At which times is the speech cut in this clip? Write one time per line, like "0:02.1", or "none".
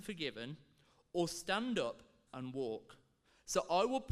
0:02.3